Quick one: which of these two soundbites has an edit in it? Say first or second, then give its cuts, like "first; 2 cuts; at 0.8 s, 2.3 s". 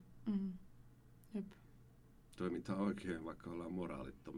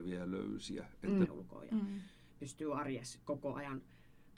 second; 1 cut; at 1.3 s